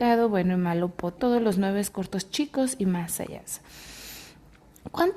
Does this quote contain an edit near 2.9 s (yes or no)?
no